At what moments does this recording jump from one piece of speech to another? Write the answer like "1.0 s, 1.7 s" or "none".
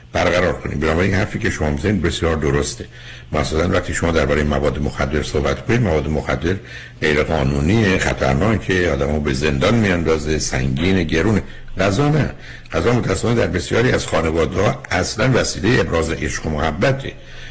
2.0 s